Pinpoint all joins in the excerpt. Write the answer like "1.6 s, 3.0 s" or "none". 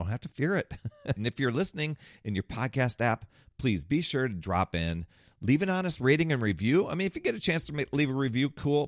1.2 s